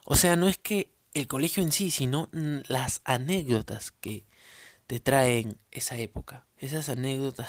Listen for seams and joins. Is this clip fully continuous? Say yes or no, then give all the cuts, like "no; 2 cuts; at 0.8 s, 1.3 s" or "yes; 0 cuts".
no; 1 cut; at 6.5 s